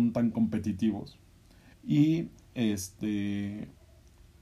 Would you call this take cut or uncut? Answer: cut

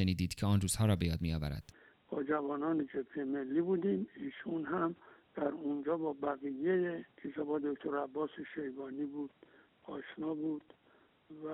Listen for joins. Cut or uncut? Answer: cut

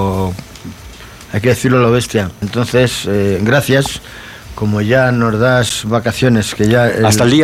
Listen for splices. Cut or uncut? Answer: cut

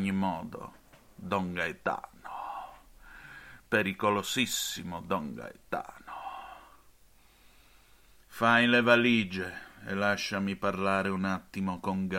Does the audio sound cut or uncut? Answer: uncut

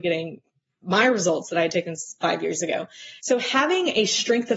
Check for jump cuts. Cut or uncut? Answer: cut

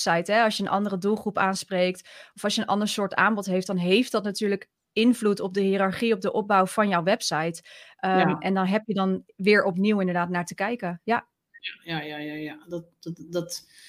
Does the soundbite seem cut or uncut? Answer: uncut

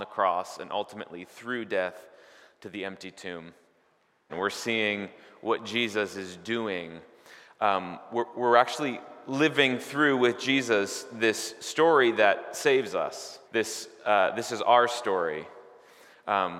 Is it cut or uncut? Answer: cut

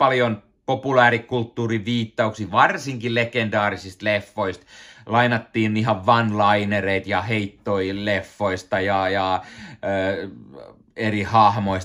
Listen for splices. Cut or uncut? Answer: uncut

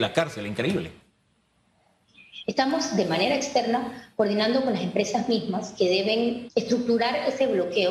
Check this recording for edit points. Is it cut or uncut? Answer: cut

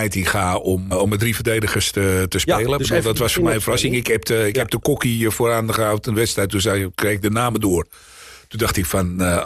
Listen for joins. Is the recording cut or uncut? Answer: cut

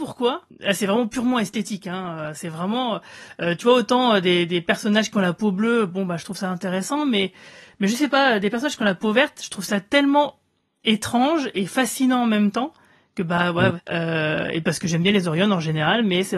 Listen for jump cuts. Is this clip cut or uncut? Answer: cut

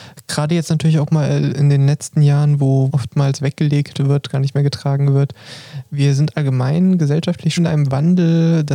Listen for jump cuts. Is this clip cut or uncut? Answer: cut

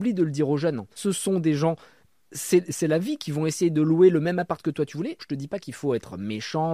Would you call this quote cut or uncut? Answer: cut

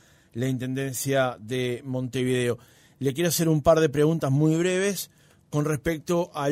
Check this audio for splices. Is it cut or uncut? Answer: uncut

